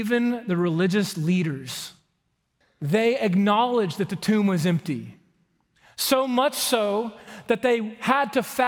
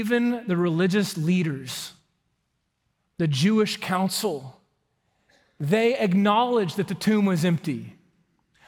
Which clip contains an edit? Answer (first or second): first